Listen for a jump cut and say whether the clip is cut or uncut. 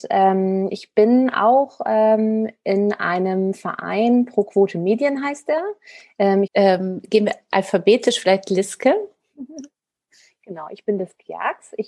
cut